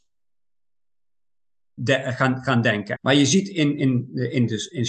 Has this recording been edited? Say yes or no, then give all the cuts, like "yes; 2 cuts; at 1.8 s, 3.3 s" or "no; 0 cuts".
yes; 2 cuts; at 1.8 s, 3.0 s